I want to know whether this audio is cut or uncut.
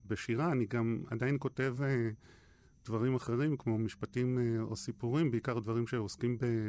uncut